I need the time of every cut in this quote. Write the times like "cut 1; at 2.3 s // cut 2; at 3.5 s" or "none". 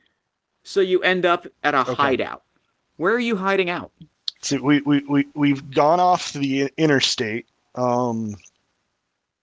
cut 1; at 4.4 s